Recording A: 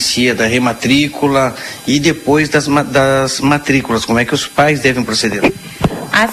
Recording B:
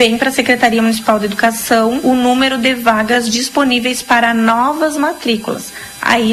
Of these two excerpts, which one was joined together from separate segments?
B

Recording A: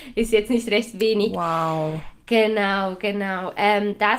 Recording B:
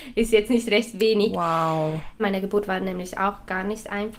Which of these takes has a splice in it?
B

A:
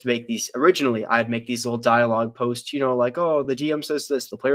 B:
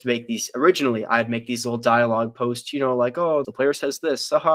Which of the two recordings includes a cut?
B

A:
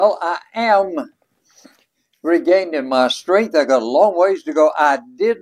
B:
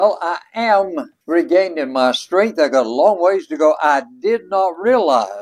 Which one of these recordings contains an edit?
B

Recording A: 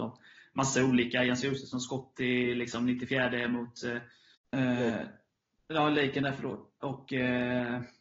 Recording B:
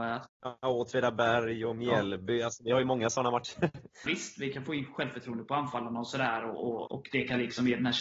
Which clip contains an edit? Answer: B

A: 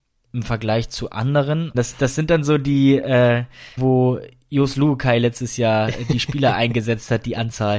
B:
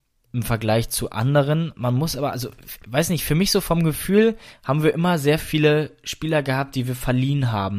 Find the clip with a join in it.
A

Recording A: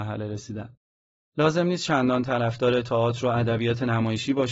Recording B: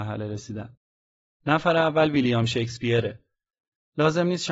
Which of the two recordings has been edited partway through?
A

